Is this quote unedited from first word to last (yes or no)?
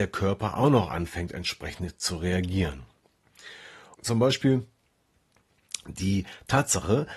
no